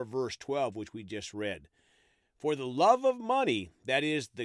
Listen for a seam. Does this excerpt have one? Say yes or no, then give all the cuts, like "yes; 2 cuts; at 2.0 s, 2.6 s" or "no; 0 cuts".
yes; 1 cut; at 2.2 s